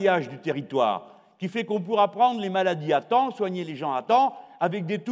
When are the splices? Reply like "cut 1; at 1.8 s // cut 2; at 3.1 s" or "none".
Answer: none